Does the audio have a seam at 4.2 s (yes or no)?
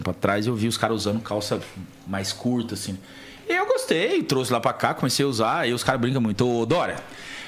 no